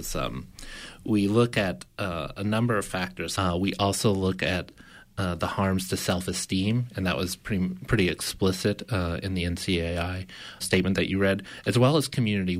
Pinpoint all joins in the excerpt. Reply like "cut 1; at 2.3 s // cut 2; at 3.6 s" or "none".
cut 1; at 3.4 s // cut 2; at 10.6 s